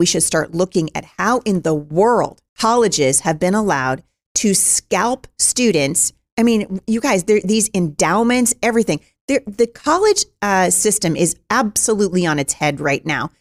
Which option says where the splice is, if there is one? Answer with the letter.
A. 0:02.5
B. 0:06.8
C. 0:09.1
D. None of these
A